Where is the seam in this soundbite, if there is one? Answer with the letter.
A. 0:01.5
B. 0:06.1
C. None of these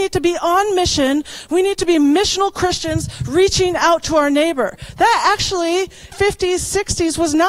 B